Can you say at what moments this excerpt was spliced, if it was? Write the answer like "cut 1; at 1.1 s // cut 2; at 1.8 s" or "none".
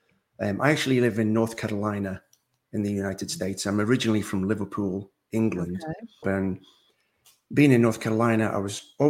cut 1; at 6.2 s